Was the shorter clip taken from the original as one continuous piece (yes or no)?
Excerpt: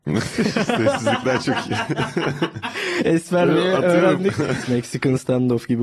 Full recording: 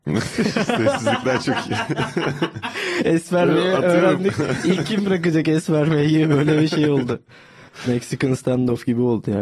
no